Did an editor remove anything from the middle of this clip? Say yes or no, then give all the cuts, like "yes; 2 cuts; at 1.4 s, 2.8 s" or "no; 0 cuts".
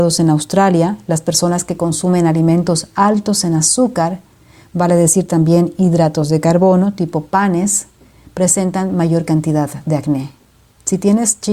no; 0 cuts